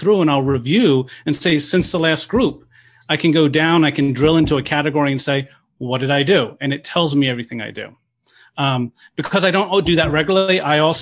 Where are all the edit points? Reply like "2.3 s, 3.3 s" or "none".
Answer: none